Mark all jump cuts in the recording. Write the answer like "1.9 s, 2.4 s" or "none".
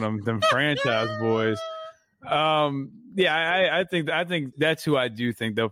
4.5 s